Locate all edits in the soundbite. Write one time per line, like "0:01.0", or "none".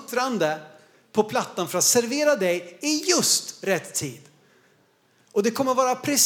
none

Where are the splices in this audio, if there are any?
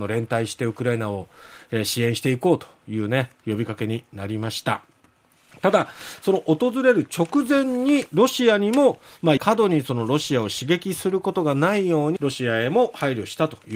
0:09.4
0:12.2

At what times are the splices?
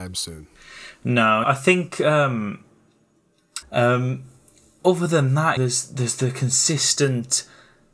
0:01.4
0:03.6
0:05.6

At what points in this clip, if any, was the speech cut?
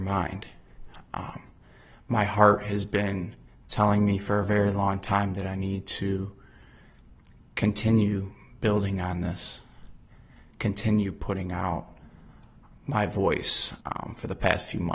0:13.8

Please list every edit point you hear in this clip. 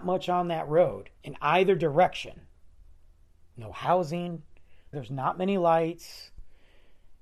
0:01.2
0:04.9

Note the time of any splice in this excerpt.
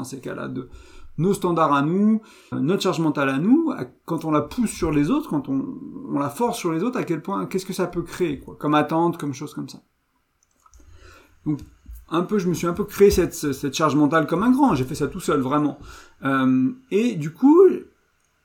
0:02.5

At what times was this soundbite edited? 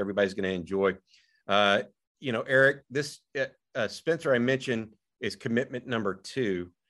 none

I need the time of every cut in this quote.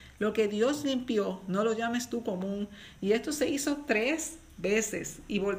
none

